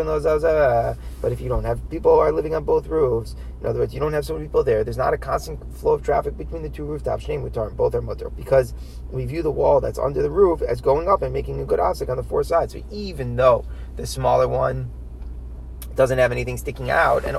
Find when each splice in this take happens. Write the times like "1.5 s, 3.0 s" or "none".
8.3 s